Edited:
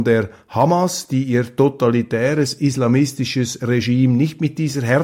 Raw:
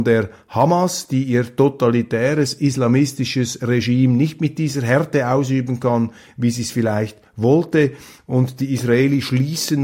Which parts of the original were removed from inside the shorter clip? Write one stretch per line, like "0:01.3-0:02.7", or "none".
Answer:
none